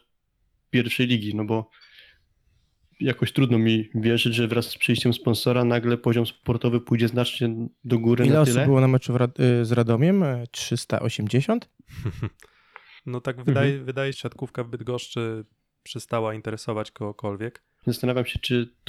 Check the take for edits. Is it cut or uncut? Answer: cut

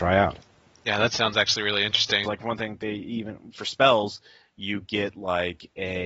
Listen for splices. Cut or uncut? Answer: cut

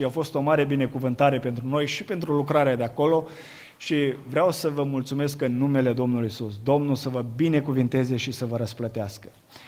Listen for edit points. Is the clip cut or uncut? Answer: uncut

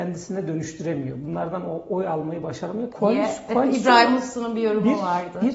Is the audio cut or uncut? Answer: cut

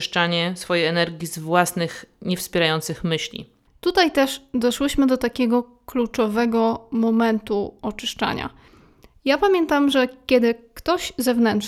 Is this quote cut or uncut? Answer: uncut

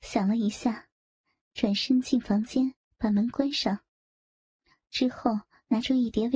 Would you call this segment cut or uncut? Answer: uncut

